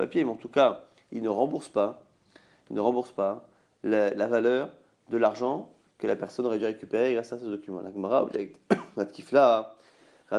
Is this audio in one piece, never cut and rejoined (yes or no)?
yes